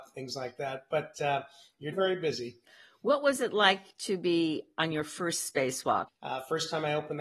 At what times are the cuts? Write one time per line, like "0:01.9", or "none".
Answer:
0:01.9
0:06.1